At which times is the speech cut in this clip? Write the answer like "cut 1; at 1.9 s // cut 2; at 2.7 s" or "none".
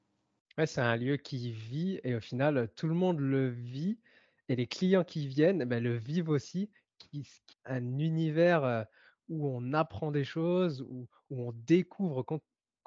cut 1; at 7.5 s